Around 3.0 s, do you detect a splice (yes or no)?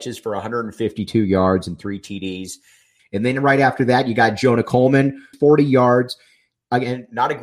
yes